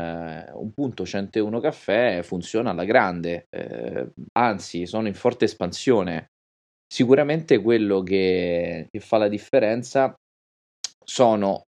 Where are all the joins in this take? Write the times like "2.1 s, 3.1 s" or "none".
4.3 s, 6.7 s